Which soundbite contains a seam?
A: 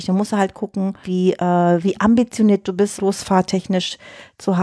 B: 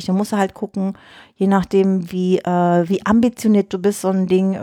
A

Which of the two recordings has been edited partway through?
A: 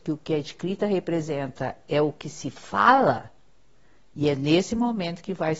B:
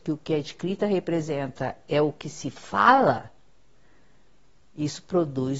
A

